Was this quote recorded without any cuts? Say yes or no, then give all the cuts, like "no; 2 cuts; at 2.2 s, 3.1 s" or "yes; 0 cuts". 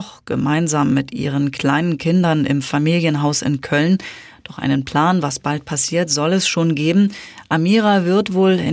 yes; 0 cuts